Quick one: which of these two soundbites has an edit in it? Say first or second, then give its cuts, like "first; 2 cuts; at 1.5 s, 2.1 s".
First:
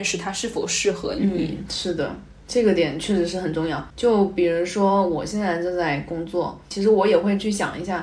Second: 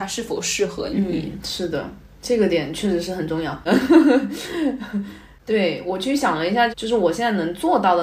second; 2 cuts; at 3.7 s, 6.7 s